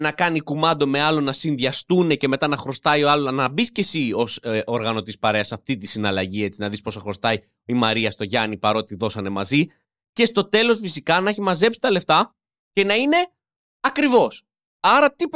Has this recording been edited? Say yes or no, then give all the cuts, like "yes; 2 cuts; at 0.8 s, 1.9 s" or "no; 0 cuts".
no; 0 cuts